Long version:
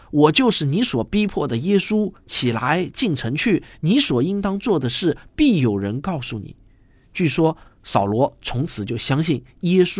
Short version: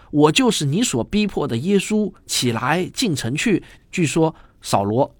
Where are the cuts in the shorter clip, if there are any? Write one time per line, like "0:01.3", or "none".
0:03.8